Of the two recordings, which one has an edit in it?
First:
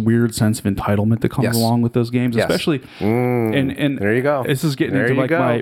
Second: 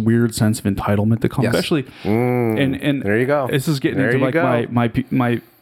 second; 1 cut; at 1.5 s

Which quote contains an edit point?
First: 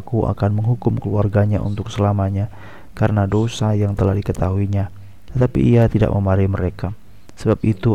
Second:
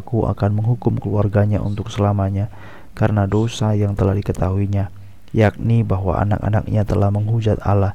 first; 1 cut; at 5.3 s

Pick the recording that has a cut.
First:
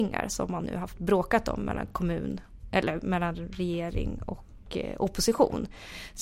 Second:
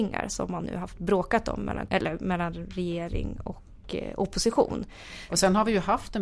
second; 2 cuts; at 1.9 s, 5.3 s

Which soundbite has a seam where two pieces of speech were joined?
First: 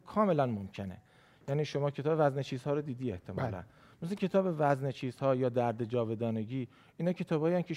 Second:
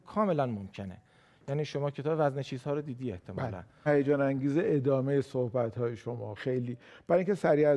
second; 2 cuts; at 3.9 s, 6.4 s

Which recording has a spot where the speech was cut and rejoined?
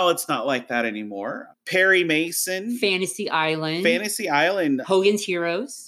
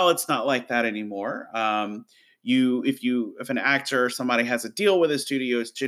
first; 2 cuts; at 1.5 s, 4.8 s

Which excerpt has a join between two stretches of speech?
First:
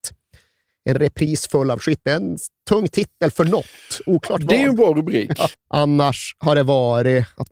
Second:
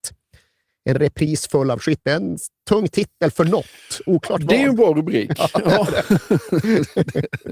first; 1 cut; at 5.5 s

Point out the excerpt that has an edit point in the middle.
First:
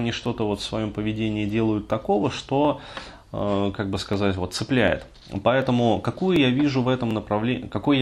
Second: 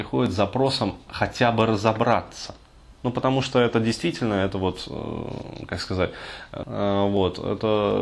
second; 1 cut; at 6.6 s

